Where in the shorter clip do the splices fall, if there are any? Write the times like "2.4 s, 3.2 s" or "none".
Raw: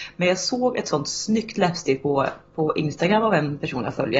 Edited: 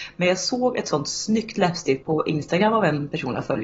2.0 s

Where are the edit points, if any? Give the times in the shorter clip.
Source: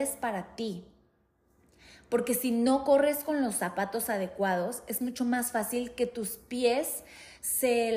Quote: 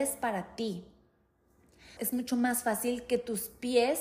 2.0 s

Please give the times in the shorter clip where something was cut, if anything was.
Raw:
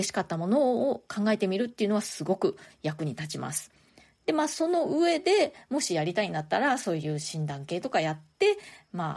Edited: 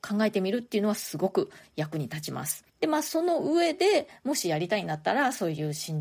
2.7 s

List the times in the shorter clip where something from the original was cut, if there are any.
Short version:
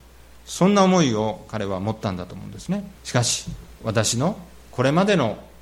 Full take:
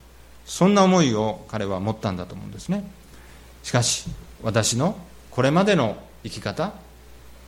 3.0 s

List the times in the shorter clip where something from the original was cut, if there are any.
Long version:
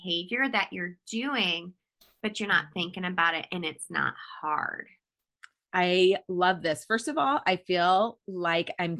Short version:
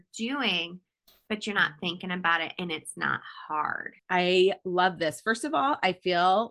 4.0 s

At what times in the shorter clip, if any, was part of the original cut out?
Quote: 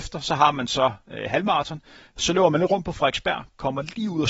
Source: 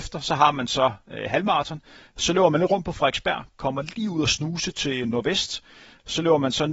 none

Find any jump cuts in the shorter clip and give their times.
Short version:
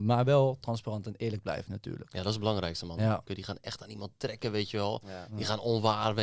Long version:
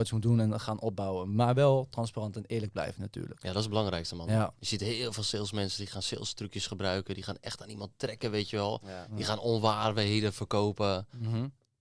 3.3 s

